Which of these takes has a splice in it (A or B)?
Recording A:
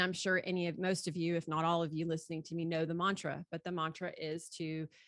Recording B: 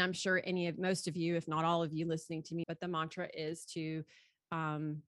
B